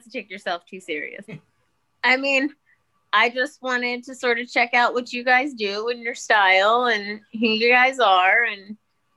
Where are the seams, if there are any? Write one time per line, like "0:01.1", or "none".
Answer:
0:01.2

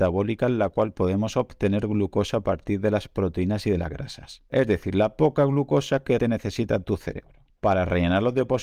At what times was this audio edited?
0:06.2
0:07.5

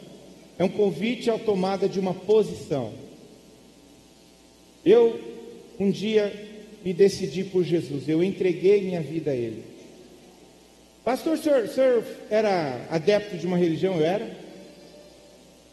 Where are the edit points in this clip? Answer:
none

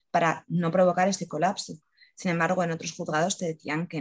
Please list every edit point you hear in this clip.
none

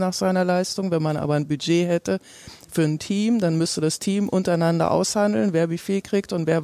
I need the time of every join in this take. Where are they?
none

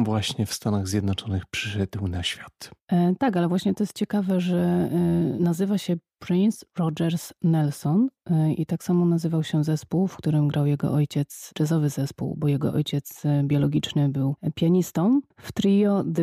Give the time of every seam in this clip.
0:15.3

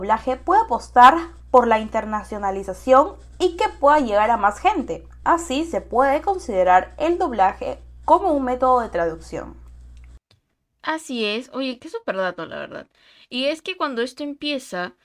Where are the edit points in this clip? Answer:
0:11.8

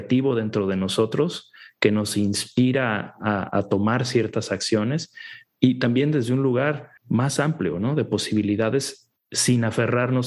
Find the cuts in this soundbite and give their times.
0:07.0

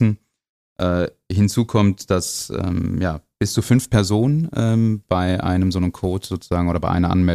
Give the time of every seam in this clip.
none

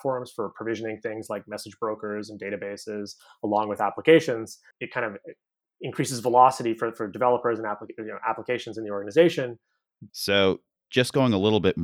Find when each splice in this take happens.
0:04.7
0:10.1

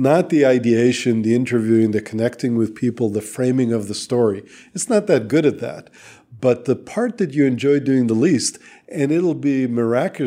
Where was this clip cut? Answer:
none

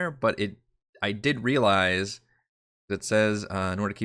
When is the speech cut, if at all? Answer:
none

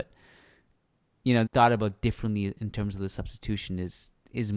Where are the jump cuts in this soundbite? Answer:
0:01.5

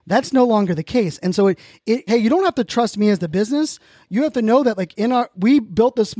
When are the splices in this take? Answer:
0:02.1

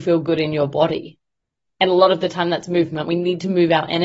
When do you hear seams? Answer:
none

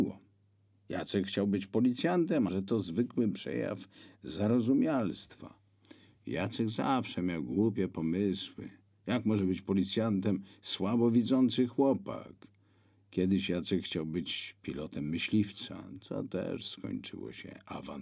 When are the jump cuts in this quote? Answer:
0:02.5

